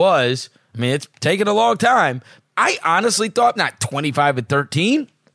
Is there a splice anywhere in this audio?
yes; 2 cuts; at 2.4 s, 3.6 s

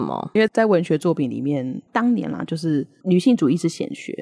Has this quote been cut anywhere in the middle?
no; 0 cuts

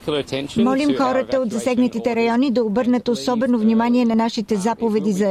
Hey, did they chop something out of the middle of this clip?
no; 0 cuts

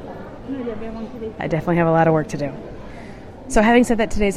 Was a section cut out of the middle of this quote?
no; 0 cuts

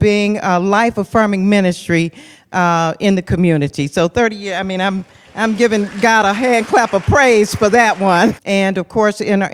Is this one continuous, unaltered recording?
no; 1 cut; at 8.4 s

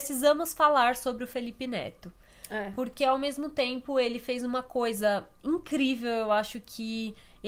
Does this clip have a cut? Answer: no; 0 cuts

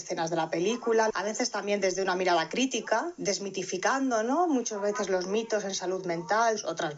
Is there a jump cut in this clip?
yes; 1 cut; at 1.1 s

